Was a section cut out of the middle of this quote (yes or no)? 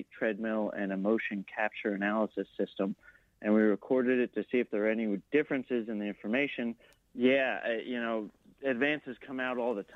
yes